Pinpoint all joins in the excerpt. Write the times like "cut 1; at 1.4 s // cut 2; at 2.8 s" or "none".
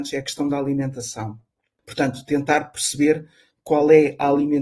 none